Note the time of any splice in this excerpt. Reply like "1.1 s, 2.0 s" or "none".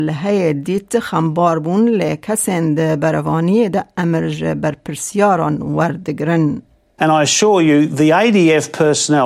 7.0 s